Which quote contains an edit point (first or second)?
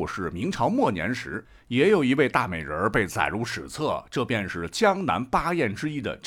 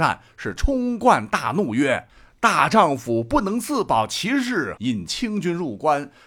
second